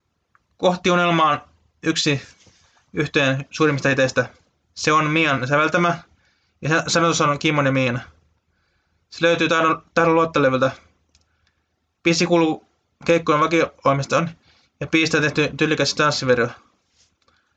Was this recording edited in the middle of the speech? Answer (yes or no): no